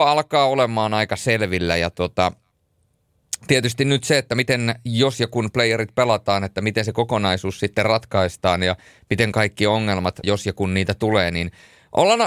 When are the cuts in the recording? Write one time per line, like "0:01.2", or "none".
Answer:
0:10.2